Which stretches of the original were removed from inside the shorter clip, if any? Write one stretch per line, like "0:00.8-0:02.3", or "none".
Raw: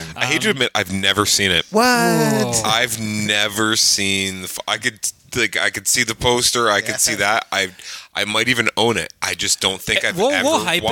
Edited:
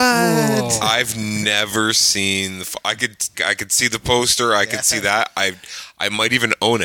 0:05.2-0:05.5